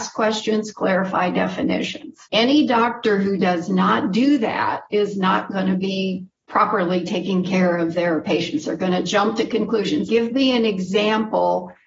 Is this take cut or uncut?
cut